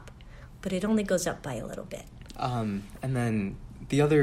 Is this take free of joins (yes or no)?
no